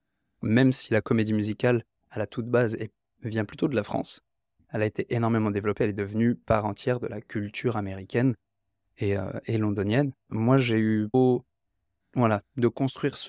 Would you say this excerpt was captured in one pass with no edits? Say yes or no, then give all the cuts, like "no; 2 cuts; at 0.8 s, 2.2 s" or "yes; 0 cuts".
no; 2 cuts; at 10.3 s, 12.0 s